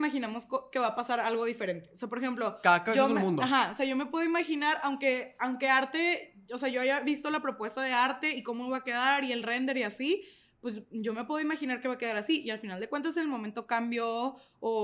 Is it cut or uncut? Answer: uncut